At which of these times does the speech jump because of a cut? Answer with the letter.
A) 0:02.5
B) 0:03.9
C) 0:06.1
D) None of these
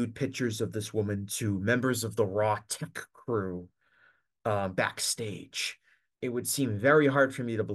C